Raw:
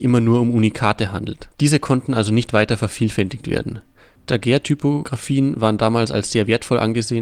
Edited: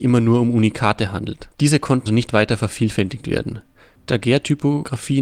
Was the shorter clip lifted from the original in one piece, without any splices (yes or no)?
no